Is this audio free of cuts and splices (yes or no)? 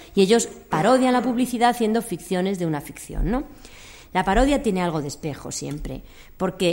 no